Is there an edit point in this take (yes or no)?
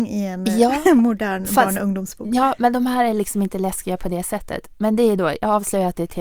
no